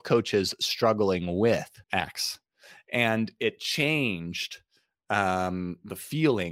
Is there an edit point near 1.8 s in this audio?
yes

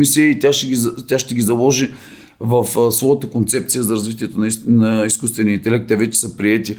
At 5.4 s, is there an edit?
no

